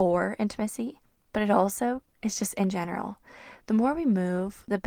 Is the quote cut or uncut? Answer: uncut